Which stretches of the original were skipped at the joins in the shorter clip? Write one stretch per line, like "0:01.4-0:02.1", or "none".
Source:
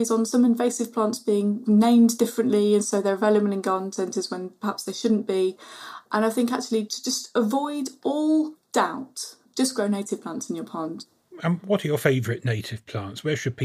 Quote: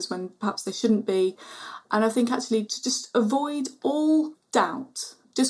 none